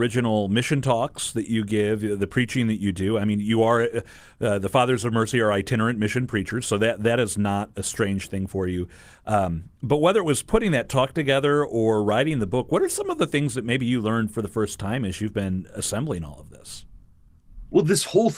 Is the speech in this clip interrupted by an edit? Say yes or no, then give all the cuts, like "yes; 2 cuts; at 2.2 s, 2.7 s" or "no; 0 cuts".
no; 0 cuts